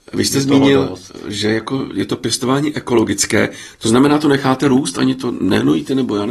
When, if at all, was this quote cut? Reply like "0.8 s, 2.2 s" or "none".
none